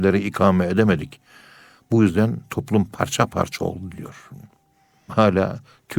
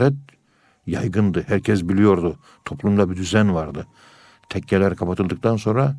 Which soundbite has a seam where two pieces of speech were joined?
first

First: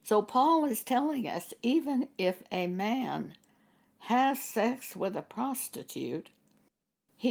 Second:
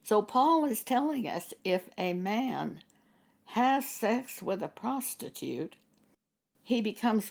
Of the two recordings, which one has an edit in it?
second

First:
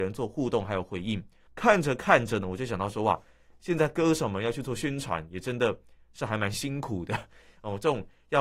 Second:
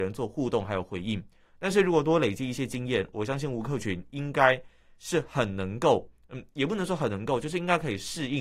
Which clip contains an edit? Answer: first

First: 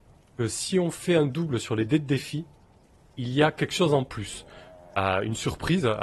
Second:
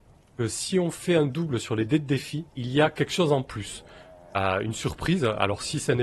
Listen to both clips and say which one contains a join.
second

